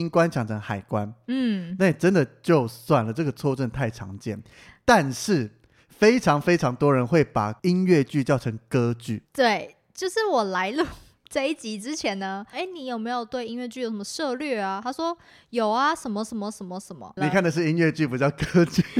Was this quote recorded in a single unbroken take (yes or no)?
no